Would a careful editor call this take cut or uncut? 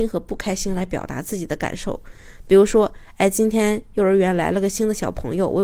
uncut